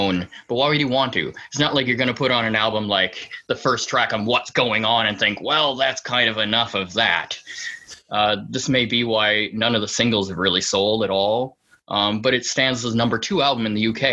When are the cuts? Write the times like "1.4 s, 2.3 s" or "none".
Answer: none